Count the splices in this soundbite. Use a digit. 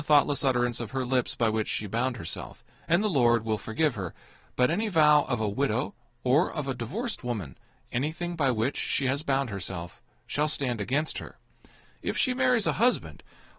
1